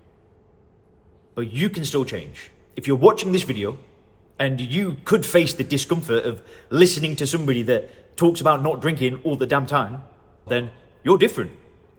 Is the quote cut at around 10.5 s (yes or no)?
yes